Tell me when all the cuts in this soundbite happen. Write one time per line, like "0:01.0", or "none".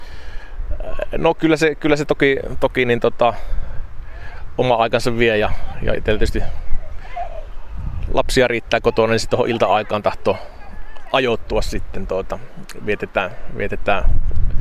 0:05.9